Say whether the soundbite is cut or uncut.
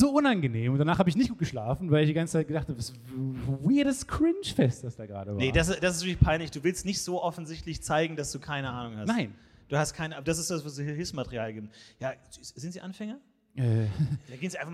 uncut